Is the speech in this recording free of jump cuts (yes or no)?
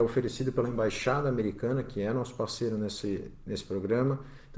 yes